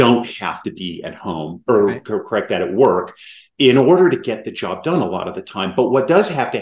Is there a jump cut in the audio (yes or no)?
no